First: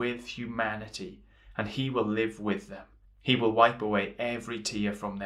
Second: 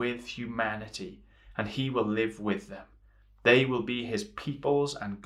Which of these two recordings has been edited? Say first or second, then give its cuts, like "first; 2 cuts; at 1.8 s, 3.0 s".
first; 1 cut; at 3.0 s